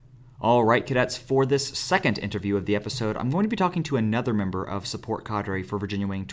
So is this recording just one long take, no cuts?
yes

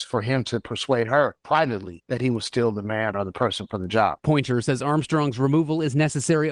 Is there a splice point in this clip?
no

